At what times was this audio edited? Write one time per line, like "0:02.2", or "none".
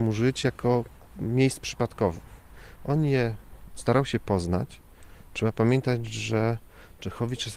none